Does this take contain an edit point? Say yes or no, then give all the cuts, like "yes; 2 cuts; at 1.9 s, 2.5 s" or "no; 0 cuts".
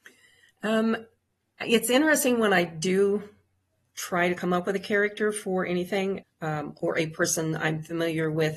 yes; 1 cut; at 6.2 s